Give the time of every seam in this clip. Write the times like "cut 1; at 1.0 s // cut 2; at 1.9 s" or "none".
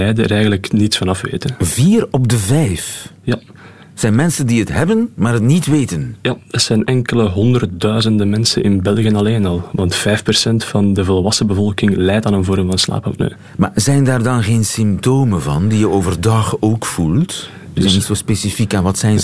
cut 1; at 17.7 s